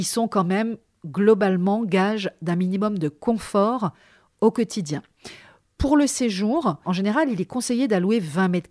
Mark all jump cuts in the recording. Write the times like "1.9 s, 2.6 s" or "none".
6.8 s

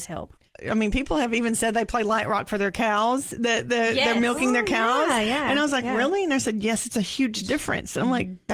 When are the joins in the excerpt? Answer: none

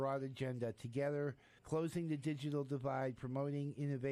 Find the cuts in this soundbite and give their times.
1.6 s

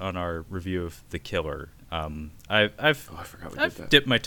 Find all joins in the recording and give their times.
none

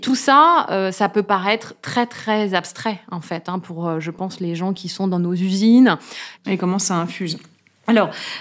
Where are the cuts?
6.4 s

